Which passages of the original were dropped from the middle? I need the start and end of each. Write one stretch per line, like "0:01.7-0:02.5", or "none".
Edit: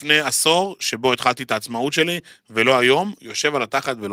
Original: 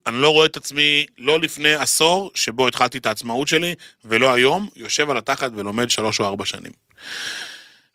none

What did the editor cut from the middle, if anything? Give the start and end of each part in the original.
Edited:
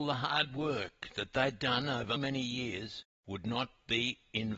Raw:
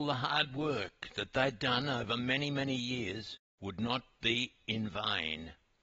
0:02.2-0:02.5

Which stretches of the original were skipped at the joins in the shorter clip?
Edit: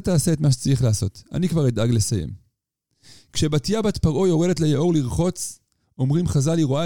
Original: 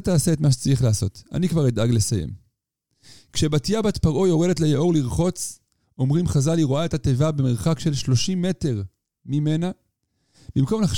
none

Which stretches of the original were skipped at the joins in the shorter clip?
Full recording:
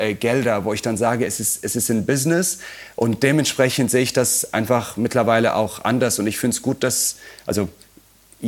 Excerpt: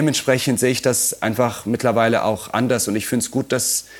none

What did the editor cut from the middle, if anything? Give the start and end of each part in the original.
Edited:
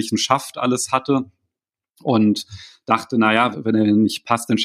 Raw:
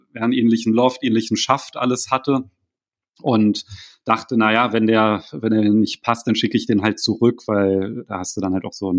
0:04.7-0:05.3

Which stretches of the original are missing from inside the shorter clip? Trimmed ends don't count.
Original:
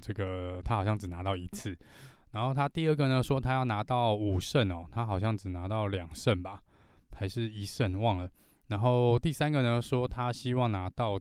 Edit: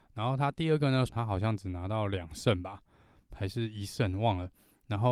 0:03.2-0:04.9

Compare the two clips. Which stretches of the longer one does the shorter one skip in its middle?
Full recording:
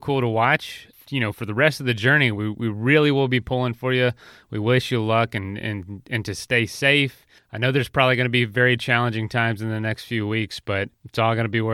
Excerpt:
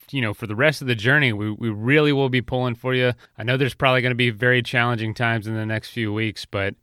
0:04.2-0:07.4

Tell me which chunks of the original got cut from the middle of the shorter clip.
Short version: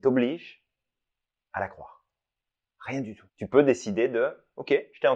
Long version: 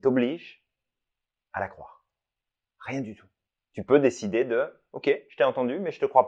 0:03.3-0:03.6

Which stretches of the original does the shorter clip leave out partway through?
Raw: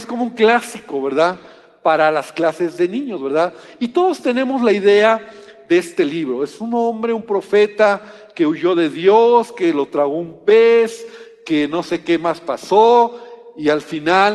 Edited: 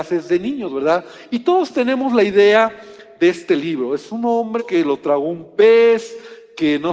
0:07.1-0:09.5

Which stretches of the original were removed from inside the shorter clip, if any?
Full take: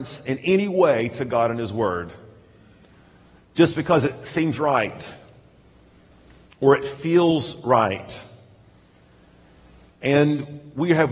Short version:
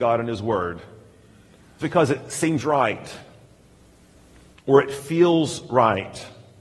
0:03.1-0:03.7

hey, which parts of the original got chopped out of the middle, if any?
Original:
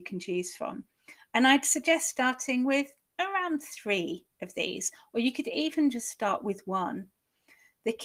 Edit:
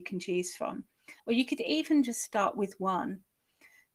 0:01.2-0:05.1

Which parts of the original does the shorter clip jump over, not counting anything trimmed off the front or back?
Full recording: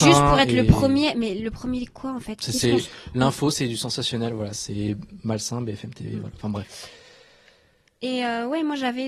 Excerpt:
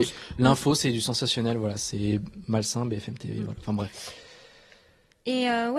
none

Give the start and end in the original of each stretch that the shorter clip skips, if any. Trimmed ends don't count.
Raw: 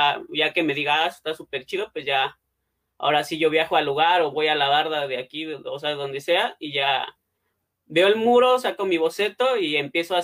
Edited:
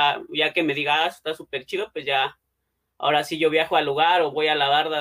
none

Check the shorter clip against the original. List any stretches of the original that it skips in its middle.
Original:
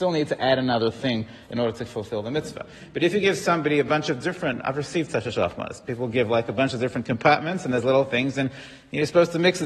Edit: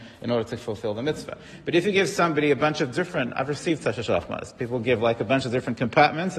none

